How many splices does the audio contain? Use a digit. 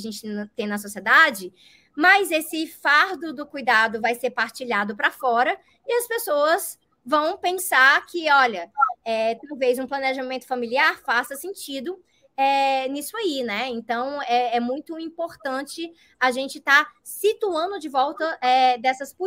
0